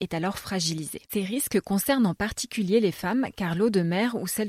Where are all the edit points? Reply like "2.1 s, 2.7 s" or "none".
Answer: 1.1 s